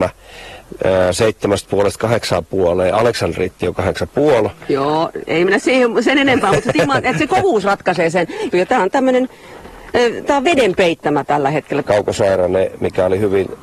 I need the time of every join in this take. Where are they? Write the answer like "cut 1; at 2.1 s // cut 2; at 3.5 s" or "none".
cut 1; at 8.5 s // cut 2; at 11.8 s